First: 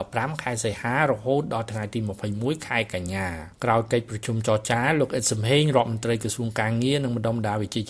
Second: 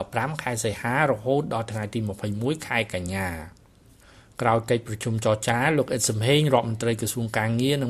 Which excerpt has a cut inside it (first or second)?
first